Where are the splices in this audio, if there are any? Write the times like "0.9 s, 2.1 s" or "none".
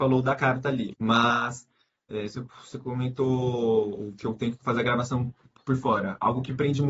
0.9 s